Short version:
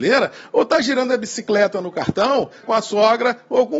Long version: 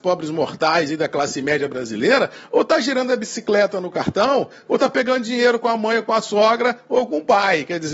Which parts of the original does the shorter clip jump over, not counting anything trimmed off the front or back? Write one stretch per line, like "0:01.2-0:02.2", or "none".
0:04.6-0:06.0